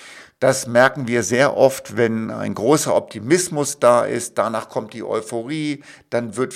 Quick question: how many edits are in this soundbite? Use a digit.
0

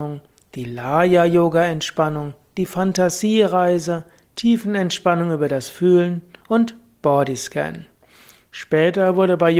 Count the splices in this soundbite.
0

